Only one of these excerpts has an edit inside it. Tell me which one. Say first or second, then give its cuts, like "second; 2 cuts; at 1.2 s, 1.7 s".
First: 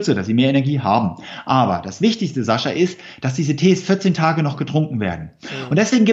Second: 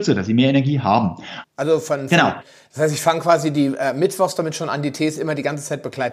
second; 1 cut; at 1.4 s